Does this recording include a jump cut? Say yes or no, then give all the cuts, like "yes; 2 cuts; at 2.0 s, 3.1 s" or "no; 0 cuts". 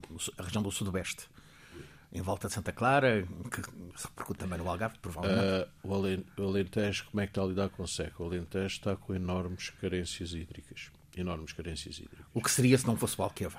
no; 0 cuts